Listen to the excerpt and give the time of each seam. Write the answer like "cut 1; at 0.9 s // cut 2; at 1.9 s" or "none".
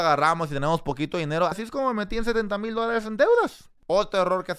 cut 1; at 1.5 s